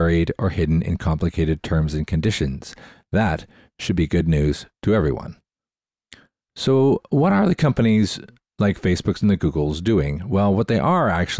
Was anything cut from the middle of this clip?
no; 0 cuts

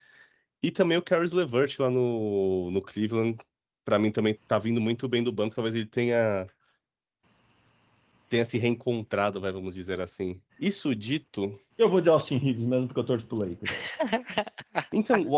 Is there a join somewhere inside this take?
yes; 3 cuts; at 4.3 s, 10.5 s, 11.7 s

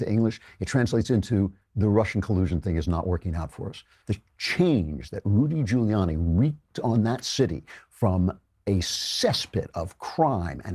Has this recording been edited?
yes; 1 cut; at 4.0 s

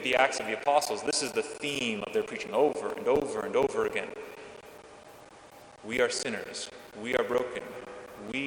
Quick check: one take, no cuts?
yes; 0 cuts

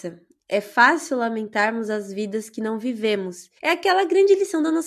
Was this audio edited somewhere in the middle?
yes; 1 cut; at 3.6 s

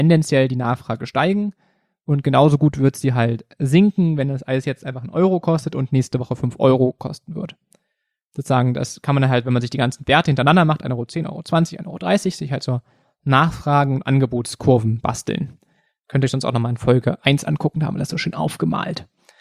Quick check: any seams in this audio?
no; 0 cuts

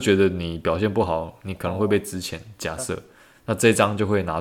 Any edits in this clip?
no; 0 cuts

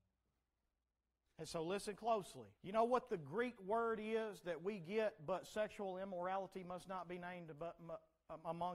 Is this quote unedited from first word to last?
no; 2 cuts; at 1.3 s, 2.5 s

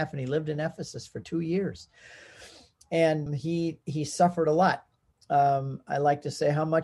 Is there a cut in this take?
yes; 1 cut; at 3.3 s

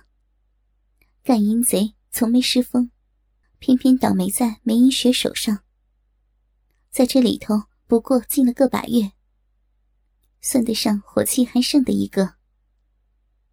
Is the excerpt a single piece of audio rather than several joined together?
no; 1 cut; at 3.4 s

